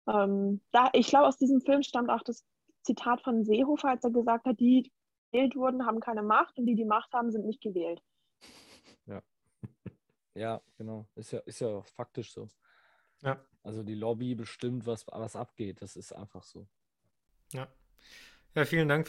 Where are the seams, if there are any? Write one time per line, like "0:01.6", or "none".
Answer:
none